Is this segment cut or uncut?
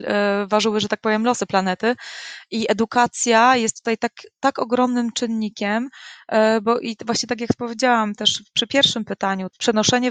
uncut